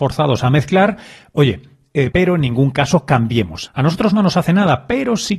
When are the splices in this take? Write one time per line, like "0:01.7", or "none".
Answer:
0:02.1
0:03.7

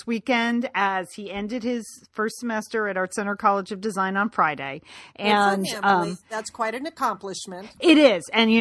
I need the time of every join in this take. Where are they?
none

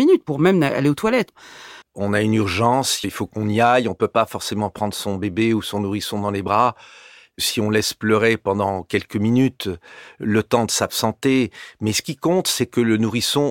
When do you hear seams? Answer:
0:01.8
0:03.0

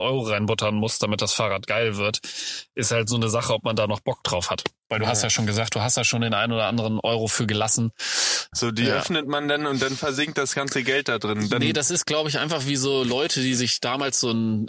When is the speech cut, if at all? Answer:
0:08.5

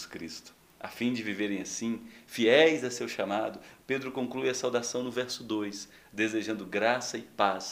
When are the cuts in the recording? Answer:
0:03.8

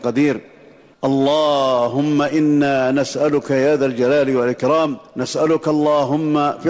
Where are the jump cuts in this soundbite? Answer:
0:05.1

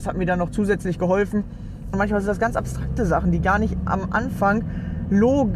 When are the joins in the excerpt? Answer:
0:01.9

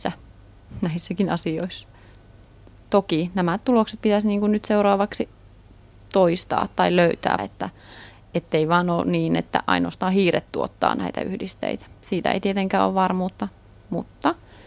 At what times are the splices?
0:07.4

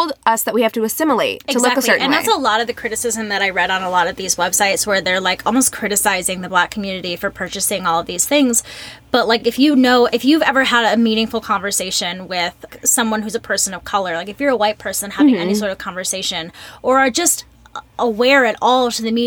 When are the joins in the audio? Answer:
none

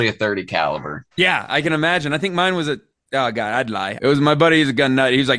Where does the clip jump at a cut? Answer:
0:01.1
0:04.0

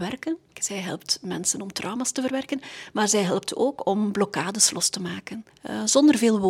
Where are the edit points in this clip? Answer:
none

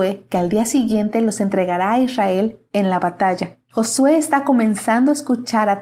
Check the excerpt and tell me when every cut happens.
0:03.7

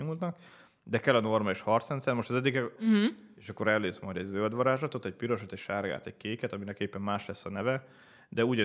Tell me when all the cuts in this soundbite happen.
0:02.8

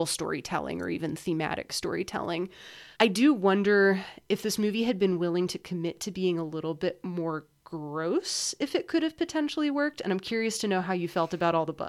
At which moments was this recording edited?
0:02.9

